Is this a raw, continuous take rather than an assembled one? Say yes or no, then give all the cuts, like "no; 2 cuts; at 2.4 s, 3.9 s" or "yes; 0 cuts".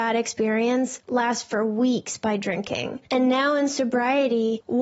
yes; 0 cuts